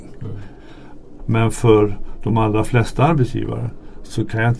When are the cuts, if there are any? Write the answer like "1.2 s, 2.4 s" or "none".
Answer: 1.2 s

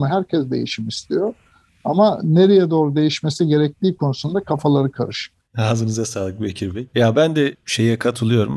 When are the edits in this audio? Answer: none

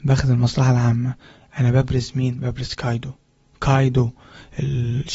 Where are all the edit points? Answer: none

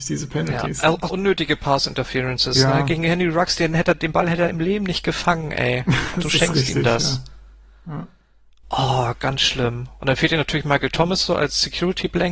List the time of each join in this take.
1.1 s

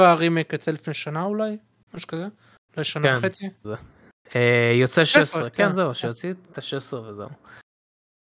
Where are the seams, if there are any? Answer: 3.6 s

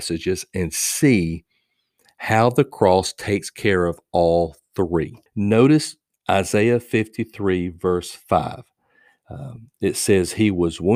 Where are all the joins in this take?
5.3 s

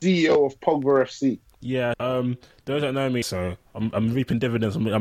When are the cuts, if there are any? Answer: 1.9 s, 3.2 s

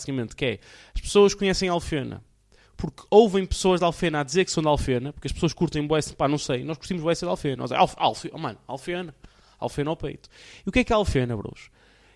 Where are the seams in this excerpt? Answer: none

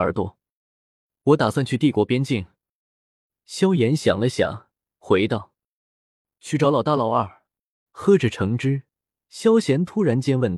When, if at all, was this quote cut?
7.9 s

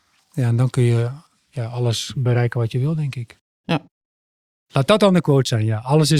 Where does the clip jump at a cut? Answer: none

